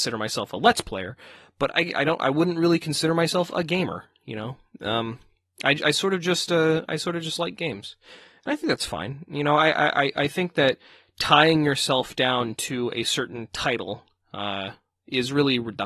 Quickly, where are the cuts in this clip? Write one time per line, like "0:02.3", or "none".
none